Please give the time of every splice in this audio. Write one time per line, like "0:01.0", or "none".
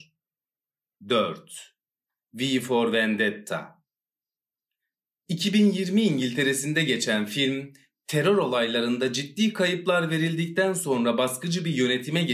0:01.0